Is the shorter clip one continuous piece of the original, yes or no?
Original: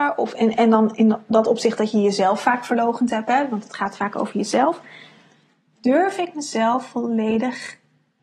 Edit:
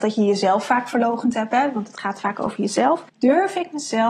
no